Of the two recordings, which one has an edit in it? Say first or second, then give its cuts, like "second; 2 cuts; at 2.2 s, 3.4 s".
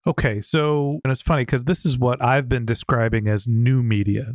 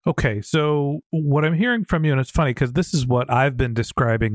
first; 1 cut; at 1.0 s